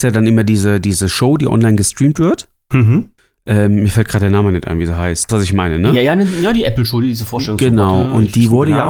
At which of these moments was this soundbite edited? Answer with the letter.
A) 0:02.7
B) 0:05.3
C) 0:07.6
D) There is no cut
B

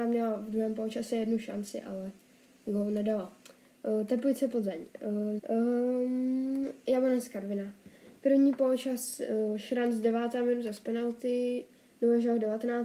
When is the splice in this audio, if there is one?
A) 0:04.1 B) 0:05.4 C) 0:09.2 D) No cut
B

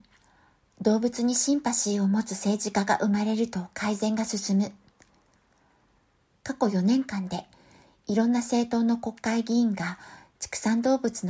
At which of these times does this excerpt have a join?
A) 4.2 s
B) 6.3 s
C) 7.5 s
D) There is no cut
B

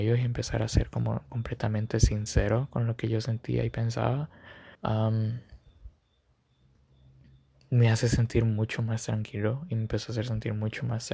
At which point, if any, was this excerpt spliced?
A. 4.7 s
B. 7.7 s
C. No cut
A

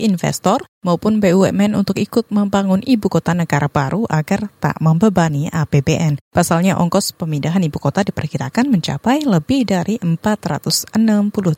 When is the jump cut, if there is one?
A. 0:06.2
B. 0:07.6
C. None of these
C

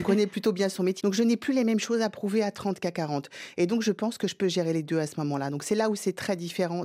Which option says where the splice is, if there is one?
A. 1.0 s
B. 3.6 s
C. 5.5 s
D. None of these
A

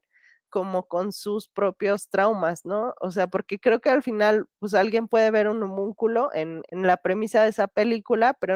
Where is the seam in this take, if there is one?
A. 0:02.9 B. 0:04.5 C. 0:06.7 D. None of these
C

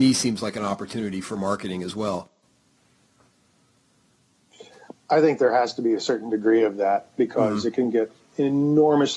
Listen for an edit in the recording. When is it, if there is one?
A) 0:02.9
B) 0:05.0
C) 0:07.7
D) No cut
D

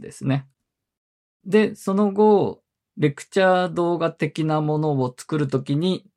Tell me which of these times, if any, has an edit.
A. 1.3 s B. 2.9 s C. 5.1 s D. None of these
B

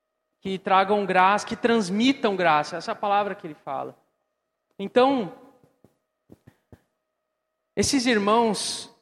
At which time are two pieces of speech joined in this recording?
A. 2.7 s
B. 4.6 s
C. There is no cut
B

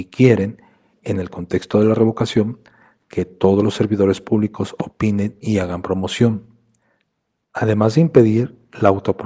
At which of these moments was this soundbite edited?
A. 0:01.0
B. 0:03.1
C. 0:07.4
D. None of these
C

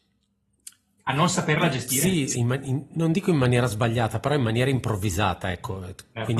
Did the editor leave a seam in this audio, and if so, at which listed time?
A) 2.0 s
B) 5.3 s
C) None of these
C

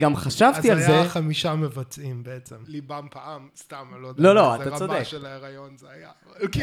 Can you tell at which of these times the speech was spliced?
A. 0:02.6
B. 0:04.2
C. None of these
A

